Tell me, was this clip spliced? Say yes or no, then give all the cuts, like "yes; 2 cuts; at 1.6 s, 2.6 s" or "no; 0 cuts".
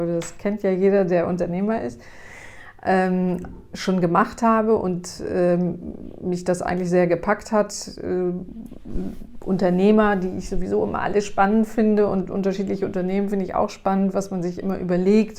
no; 0 cuts